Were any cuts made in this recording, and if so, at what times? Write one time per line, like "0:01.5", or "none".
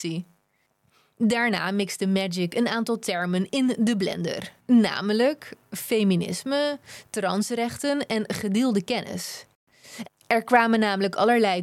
0:04.6
0:10.1